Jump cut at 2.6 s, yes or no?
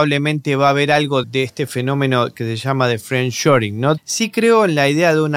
no